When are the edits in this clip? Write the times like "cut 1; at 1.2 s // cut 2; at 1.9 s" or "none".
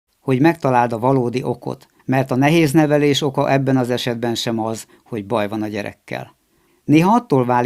cut 1; at 2.0 s // cut 2; at 6.7 s